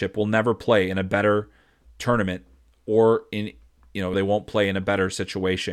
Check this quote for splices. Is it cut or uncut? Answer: cut